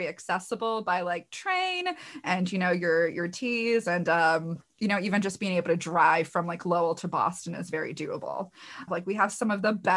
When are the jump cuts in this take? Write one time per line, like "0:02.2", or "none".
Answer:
0:08.9